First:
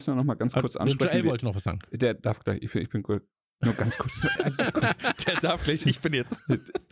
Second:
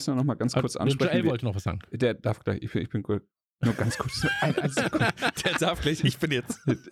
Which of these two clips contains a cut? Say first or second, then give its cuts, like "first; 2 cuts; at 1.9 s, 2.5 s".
first; 1 cut; at 4.4 s